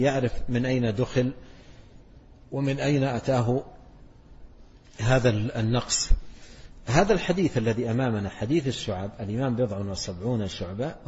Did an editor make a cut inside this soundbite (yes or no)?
no